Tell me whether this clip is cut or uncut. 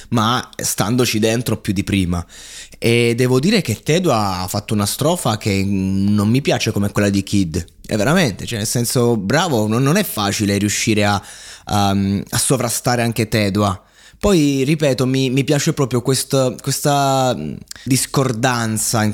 cut